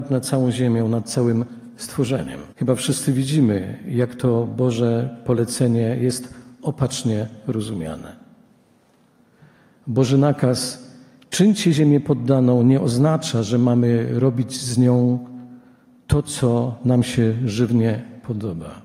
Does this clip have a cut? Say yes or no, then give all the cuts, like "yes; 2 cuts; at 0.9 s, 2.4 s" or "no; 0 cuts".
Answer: yes; 1 cut; at 2.5 s